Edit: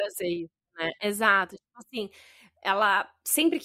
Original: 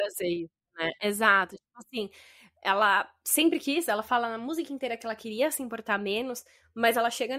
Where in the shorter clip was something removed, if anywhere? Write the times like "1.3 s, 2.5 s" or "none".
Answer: none